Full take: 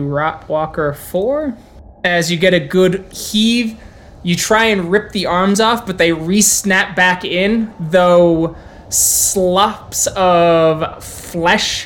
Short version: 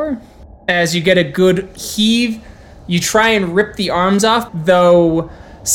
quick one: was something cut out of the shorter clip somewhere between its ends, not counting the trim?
yes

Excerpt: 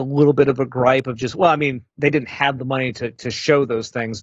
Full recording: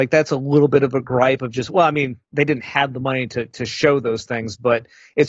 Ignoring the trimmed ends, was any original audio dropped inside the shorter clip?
no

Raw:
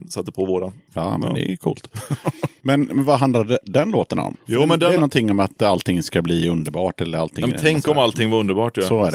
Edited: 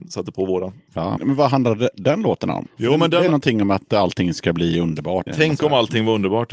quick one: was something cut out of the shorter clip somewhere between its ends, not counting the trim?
yes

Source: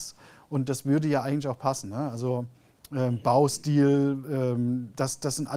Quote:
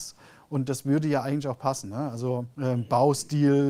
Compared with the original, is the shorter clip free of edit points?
no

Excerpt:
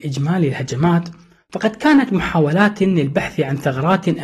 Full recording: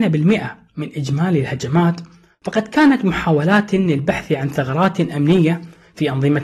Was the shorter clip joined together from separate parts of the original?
no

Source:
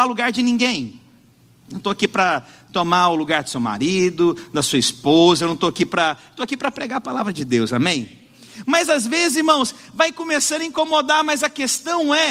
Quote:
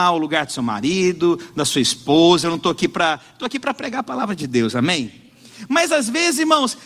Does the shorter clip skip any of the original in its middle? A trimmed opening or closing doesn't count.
no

